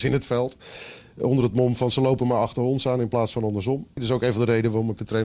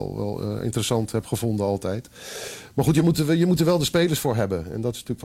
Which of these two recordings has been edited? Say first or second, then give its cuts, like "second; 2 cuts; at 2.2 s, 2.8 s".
first; 1 cut; at 4.0 s